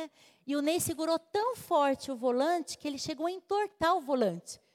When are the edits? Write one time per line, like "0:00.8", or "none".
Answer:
none